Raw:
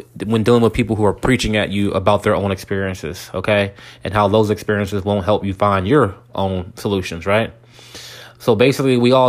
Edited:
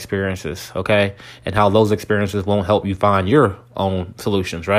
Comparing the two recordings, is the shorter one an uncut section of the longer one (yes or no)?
yes